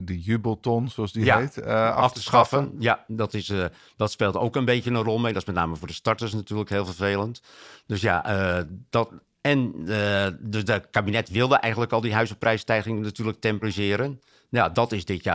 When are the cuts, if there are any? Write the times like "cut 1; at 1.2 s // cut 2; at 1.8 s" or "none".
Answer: none